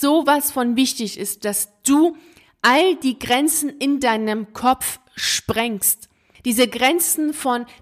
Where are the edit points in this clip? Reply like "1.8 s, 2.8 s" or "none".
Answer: none